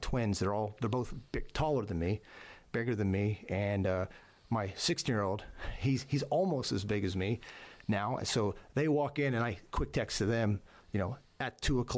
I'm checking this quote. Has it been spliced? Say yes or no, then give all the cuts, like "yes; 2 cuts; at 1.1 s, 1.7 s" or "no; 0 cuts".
no; 0 cuts